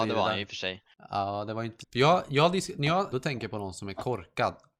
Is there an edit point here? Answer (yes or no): yes